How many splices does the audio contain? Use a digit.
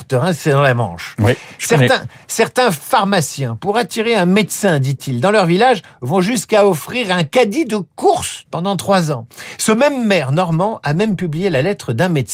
1